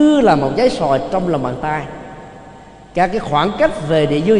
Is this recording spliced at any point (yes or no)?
no